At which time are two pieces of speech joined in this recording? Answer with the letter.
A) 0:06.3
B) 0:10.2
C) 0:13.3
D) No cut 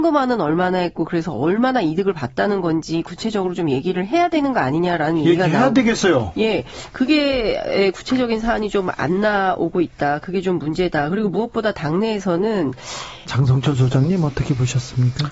C